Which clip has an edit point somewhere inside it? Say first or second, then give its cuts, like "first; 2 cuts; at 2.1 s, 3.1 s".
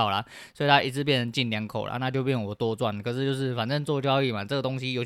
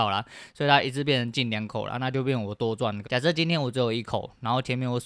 second; 1 cut; at 3.0 s